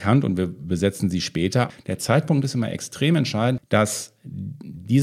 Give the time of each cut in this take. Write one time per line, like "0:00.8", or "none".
0:01.7
0:03.6